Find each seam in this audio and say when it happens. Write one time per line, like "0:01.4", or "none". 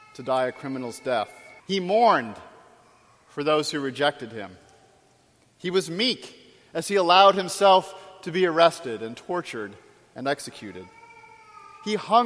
0:01.6

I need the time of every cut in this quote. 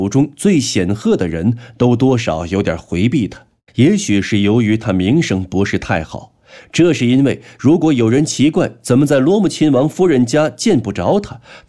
0:03.7
0:06.6

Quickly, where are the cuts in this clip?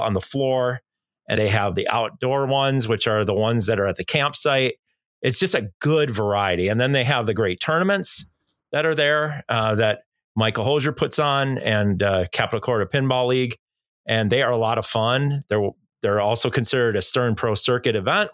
0:01.4

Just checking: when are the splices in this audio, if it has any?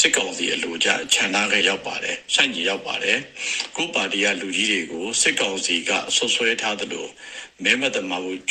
0:01.6
0:02.6

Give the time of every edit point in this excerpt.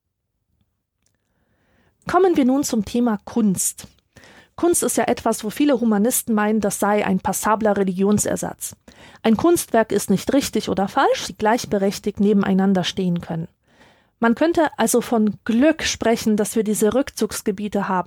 0:11.3

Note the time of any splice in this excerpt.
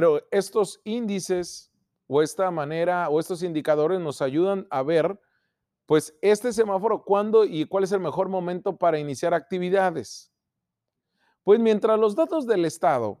none

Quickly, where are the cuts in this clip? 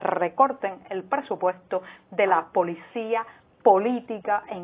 none

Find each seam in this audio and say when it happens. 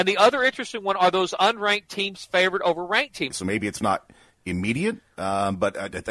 0:03.3

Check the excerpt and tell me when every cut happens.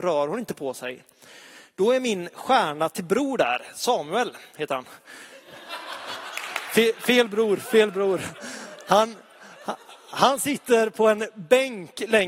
0:04.5

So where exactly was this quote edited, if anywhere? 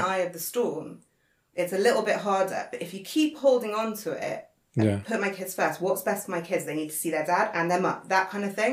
none

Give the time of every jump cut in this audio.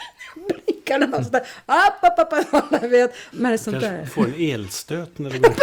0:03.3

